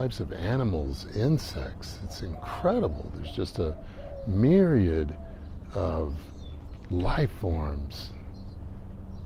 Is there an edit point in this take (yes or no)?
no